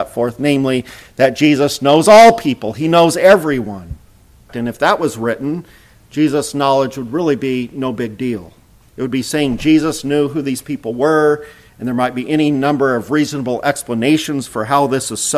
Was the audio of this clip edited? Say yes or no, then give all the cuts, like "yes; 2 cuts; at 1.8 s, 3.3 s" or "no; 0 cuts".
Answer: yes; 1 cut; at 4.5 s